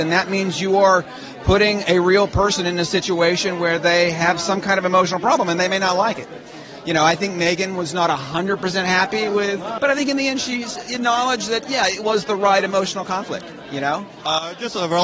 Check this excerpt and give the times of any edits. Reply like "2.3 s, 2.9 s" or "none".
9.8 s

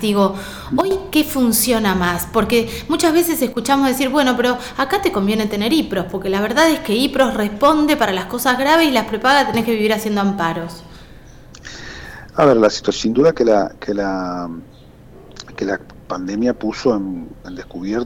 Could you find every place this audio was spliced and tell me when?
none

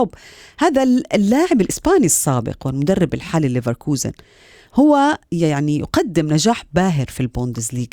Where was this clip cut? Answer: 5.3 s

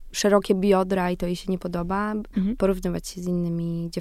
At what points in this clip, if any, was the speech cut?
2.3 s

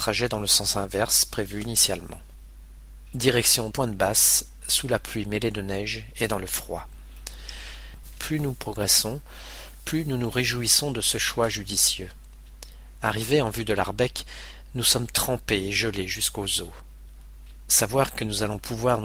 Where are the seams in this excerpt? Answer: 3.7 s

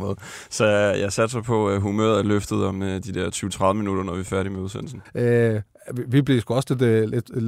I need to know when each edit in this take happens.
5.1 s

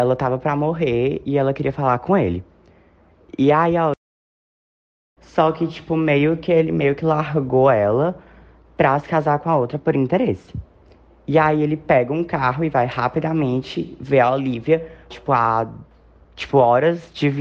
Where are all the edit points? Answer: 5.2 s, 15.1 s

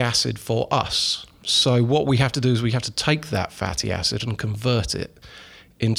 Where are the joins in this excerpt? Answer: none

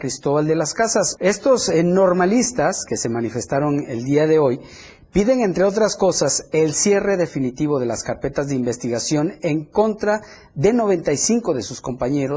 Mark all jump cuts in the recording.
1.2 s

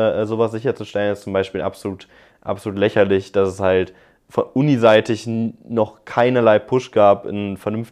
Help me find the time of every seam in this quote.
none

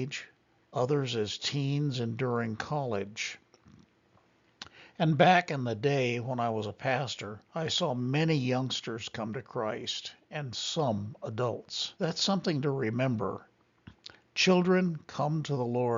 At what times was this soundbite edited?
7.5 s, 12.0 s

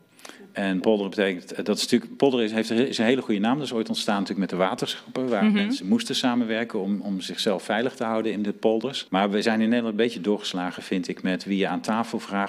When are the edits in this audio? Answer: 9.1 s

